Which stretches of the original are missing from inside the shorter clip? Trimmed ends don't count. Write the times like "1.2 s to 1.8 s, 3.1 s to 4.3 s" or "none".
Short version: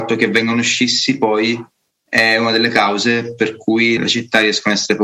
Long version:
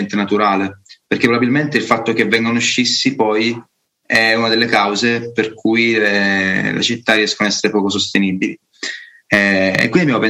5.9 s to 6.7 s